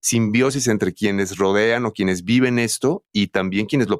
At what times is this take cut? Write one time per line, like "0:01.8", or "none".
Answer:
none